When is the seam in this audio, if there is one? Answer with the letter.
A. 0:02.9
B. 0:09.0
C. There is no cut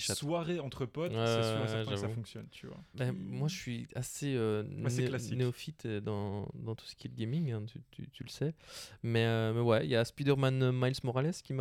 A